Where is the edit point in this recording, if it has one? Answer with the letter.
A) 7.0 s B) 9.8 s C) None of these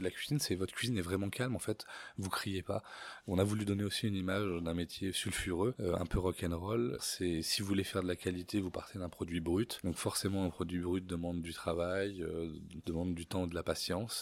A